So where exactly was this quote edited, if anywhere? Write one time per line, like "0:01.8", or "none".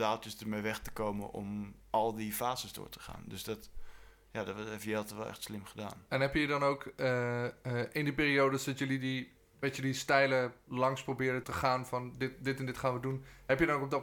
0:11.4